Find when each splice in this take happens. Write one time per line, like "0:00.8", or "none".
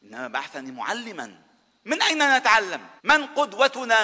0:03.0